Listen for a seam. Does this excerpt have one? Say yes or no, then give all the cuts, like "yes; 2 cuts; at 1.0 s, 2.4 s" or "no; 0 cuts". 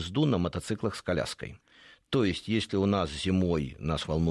no; 0 cuts